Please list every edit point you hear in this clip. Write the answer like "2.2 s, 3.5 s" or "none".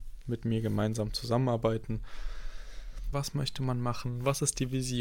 3.1 s